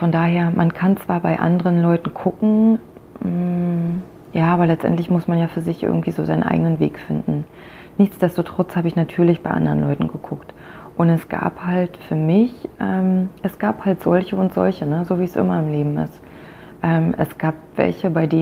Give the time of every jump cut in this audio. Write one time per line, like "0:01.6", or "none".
none